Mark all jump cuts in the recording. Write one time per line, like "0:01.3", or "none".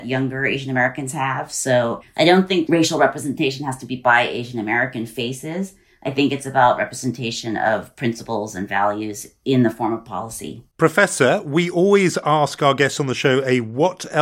0:10.7